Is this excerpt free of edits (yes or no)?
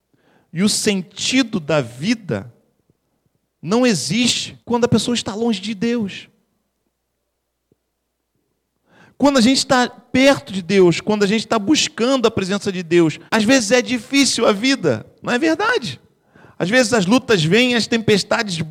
no